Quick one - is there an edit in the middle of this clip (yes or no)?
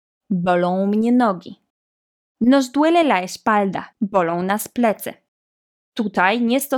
yes